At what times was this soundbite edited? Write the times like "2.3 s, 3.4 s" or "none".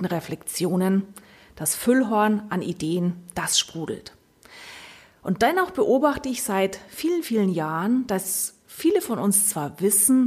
none